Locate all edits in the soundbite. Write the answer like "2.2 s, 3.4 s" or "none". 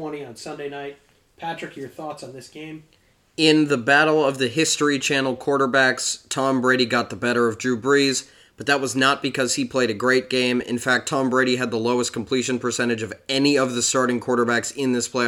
none